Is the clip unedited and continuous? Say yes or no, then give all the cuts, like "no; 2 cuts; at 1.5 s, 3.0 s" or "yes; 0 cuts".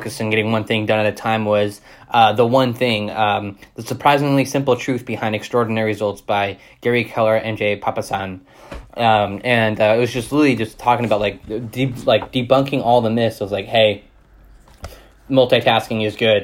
yes; 0 cuts